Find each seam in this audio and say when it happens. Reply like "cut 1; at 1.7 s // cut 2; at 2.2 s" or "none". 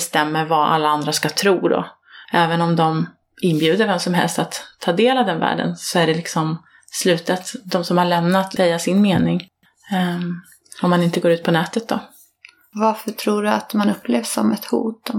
cut 1; at 2.3 s // cut 2; at 8.6 s